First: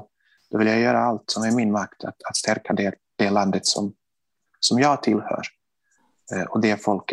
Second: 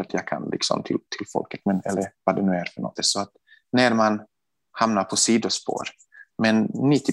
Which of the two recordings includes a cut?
second; 1 cut; at 3.0 s

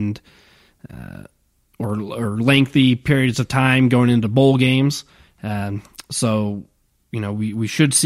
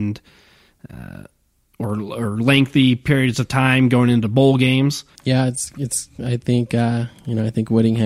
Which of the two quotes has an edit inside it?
second; 1 cut; at 5.1 s

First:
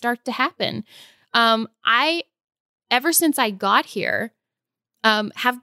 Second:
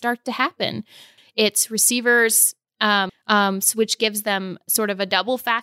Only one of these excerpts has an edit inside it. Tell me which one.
second; 2 cuts; at 1.2 s, 3.1 s

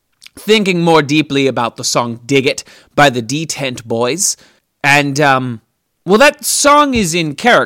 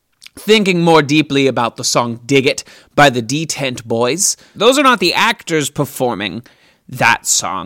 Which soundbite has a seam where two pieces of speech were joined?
second; 1 cut; at 4.5 s

